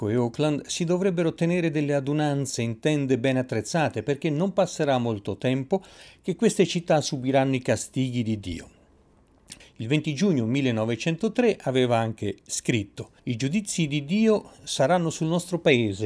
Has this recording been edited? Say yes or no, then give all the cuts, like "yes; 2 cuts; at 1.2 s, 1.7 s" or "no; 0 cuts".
yes; 2 cuts; at 9.6 s, 13.2 s